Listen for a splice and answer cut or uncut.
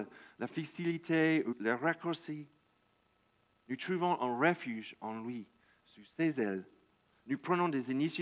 cut